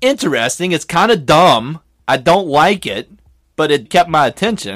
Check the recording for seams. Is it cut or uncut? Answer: cut